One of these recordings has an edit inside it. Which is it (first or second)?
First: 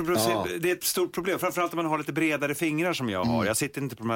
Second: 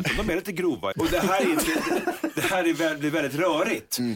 second